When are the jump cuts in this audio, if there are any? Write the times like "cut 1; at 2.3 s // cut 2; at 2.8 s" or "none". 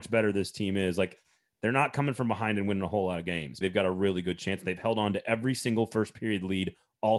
cut 1; at 3.6 s